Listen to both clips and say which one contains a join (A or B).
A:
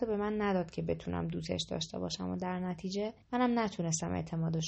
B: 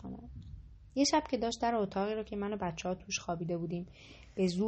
A